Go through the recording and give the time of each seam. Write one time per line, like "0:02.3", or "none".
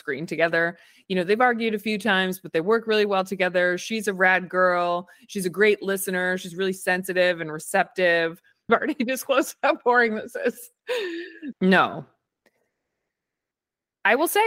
0:08.7
0:11.5